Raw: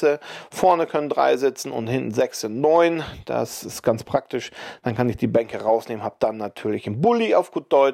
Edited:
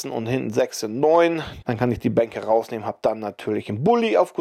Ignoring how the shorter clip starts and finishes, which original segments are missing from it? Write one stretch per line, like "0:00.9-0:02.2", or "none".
0:03.2-0:04.8